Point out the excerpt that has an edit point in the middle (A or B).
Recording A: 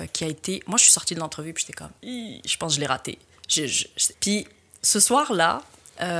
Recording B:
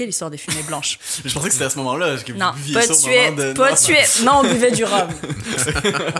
A